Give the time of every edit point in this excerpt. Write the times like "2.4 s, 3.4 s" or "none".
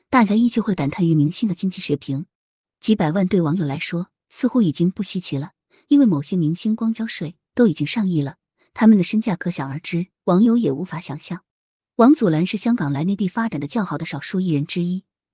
10.1 s